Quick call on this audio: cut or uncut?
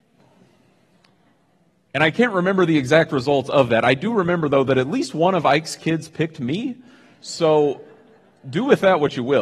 uncut